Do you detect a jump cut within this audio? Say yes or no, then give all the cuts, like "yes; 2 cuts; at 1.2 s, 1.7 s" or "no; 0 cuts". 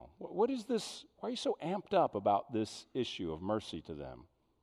no; 0 cuts